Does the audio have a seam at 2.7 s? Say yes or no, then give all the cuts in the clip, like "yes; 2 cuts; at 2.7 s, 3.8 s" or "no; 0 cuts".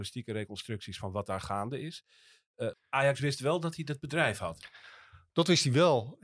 yes; 1 cut; at 2.7 s